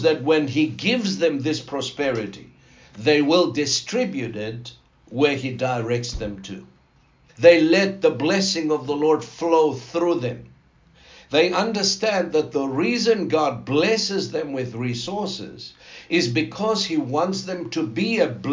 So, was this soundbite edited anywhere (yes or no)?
yes